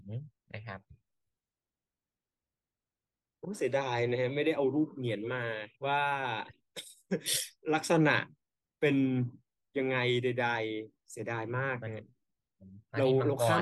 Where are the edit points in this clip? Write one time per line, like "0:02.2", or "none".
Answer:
0:05.7